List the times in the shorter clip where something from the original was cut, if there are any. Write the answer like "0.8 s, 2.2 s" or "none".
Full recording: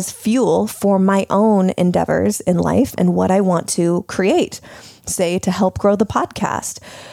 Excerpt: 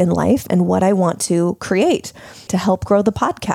2.5 s